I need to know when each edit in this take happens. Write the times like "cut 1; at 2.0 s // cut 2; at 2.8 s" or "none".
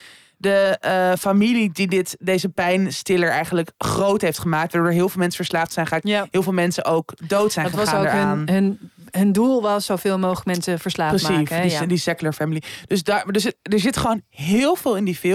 none